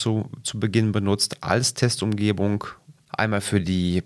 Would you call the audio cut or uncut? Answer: cut